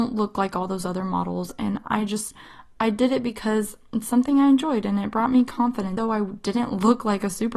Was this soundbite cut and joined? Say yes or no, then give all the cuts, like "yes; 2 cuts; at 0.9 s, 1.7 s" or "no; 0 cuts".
yes; 1 cut; at 6.0 s